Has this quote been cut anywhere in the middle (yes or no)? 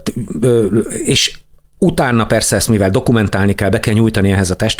no